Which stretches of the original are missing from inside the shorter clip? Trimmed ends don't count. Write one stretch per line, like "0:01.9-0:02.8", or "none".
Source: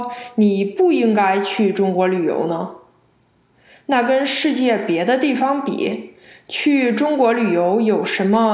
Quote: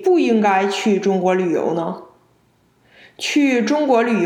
0:03.7-0:06.3